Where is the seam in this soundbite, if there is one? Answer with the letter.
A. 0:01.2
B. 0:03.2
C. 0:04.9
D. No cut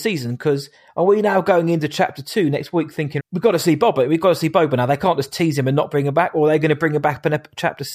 B